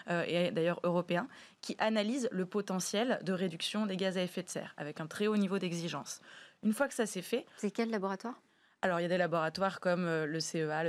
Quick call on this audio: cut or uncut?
uncut